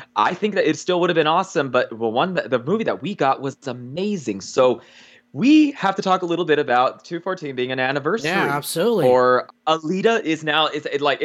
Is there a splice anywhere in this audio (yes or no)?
yes